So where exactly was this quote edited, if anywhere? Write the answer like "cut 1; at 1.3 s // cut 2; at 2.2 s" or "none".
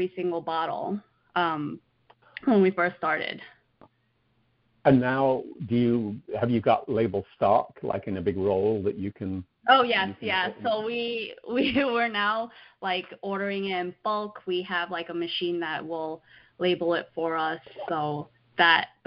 none